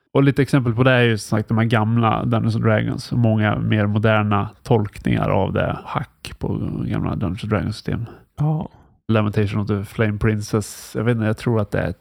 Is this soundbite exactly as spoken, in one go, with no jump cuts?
yes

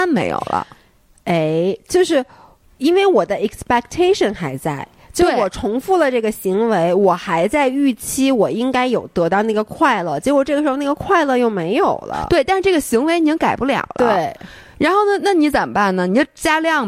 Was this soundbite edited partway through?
no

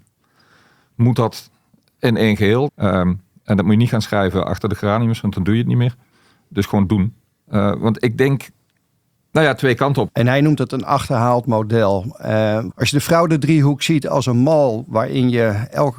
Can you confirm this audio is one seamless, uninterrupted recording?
no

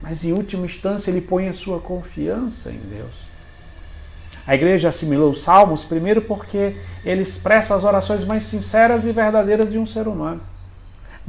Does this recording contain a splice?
no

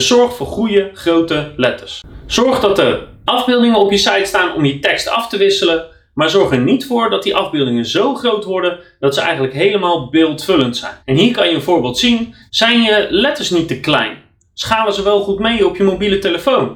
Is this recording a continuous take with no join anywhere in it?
no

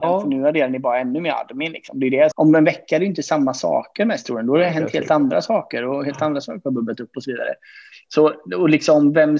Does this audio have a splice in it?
yes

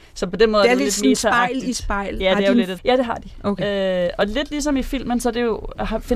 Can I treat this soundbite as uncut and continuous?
no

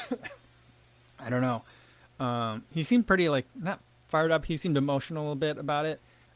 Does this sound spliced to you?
no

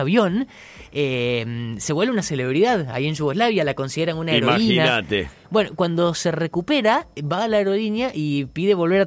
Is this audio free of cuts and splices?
yes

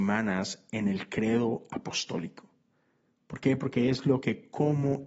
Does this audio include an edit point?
no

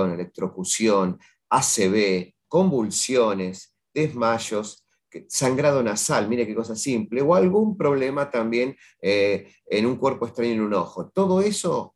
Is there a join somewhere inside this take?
yes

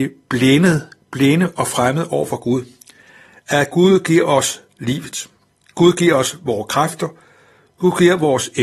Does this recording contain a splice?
no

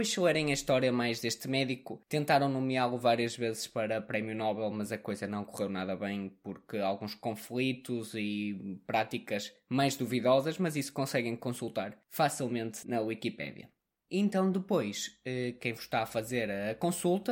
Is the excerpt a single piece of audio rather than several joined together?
yes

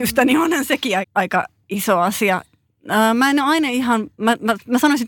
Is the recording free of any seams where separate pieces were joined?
no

